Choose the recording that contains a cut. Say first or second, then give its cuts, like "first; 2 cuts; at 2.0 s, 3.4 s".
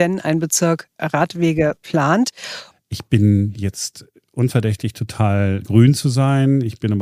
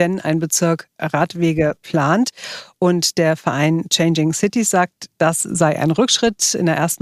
first; 2 cuts; at 2.7 s, 5.6 s